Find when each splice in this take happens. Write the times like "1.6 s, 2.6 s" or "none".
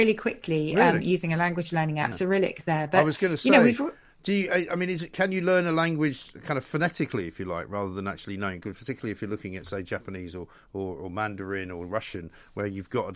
2.1 s